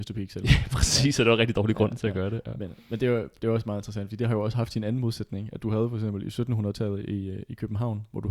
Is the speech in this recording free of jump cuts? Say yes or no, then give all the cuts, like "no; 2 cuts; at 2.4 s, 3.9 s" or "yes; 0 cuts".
yes; 0 cuts